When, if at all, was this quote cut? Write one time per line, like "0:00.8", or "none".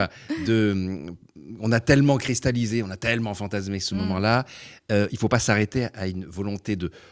none